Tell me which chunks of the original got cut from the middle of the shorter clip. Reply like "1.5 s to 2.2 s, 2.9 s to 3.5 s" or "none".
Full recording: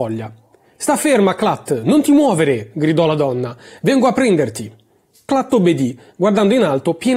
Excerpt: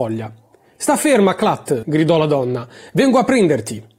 1.8 s to 2.7 s